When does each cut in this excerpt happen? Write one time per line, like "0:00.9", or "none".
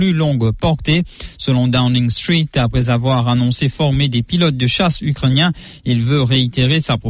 none